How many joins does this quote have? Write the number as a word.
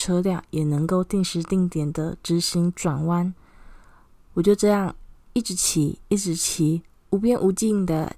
zero